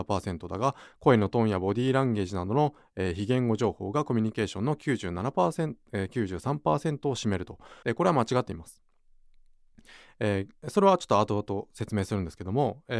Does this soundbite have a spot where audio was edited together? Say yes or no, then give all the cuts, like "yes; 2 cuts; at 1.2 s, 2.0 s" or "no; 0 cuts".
yes; 1 cut; at 7.8 s